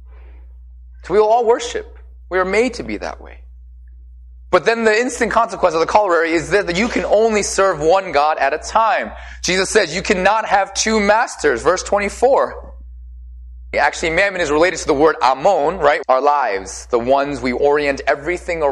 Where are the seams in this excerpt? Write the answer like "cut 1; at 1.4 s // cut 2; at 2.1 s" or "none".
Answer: cut 1; at 13.7 s // cut 2; at 16.0 s